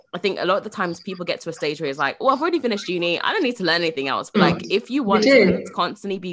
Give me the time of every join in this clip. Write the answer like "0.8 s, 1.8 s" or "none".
4.3 s